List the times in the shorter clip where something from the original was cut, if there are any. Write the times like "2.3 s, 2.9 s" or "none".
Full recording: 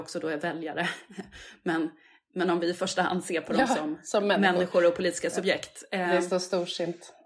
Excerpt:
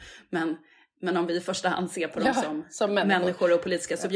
none